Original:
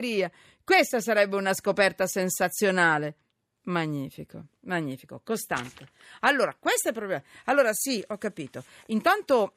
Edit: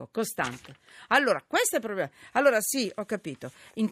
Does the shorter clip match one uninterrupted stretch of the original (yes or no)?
yes